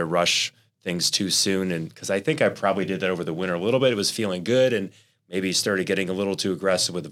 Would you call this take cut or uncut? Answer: uncut